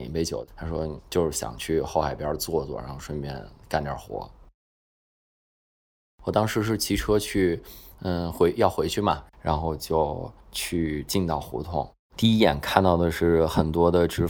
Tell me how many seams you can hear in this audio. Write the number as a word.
two